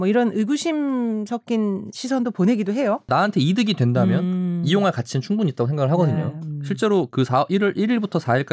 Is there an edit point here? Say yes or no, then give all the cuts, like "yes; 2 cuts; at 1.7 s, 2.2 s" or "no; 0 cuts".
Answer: no; 0 cuts